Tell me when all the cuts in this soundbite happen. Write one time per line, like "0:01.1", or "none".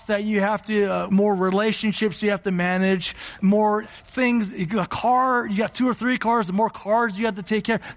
0:01.1
0:03.8